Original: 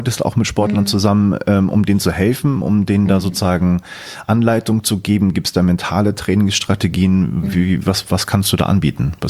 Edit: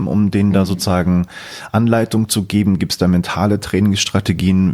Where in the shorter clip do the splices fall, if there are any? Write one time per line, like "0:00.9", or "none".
none